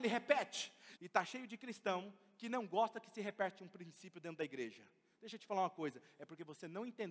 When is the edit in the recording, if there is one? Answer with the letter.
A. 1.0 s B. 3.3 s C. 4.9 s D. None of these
A